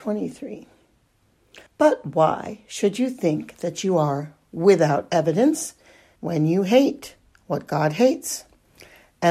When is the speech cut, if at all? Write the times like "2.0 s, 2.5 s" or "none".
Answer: 1.7 s, 6.2 s